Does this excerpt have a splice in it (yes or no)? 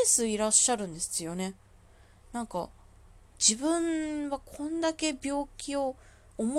no